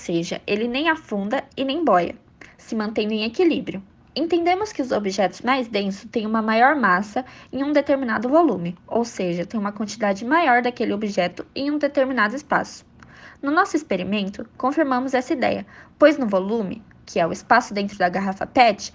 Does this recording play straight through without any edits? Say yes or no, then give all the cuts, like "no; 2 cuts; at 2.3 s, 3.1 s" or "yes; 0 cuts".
yes; 0 cuts